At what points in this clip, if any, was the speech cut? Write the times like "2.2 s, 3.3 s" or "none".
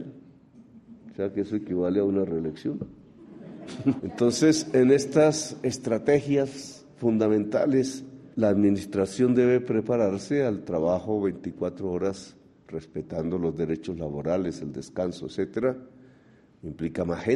4.0 s, 8.3 s